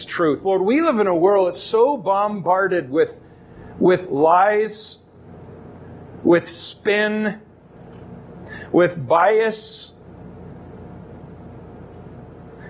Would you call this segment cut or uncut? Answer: uncut